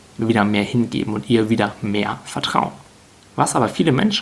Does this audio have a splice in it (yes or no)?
no